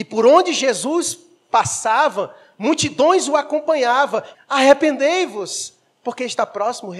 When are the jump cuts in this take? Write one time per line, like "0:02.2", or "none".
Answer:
0:04.3